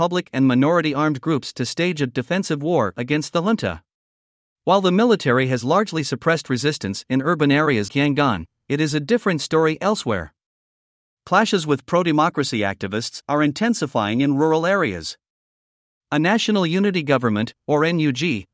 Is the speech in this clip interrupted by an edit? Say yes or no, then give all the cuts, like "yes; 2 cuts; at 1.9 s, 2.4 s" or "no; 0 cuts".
yes; 2 cuts; at 4.5 s, 7.9 s